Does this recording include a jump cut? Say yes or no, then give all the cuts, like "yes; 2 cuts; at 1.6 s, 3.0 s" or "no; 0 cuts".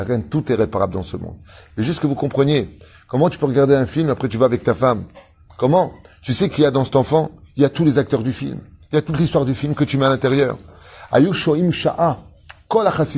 no; 0 cuts